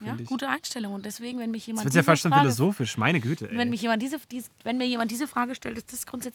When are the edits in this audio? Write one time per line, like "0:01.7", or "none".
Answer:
none